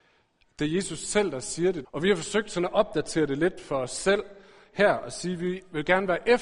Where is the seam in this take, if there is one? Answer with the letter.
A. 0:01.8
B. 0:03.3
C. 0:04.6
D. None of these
A